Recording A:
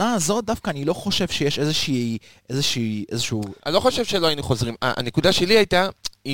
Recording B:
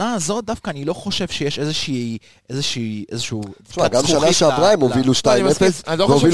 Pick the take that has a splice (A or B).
A